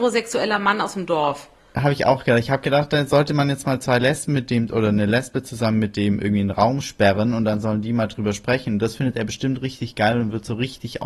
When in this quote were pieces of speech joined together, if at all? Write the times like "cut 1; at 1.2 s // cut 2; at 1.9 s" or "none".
none